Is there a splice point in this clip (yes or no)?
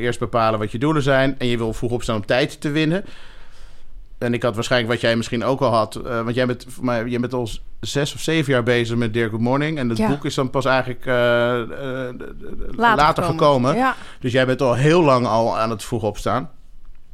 no